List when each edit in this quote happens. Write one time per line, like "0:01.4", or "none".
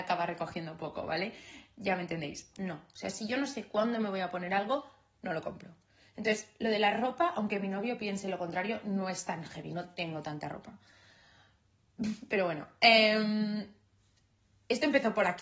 0:02.5